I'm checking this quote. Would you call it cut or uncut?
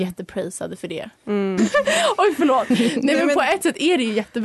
cut